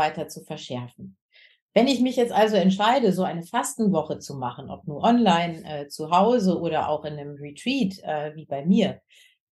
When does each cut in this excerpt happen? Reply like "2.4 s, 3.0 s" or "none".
none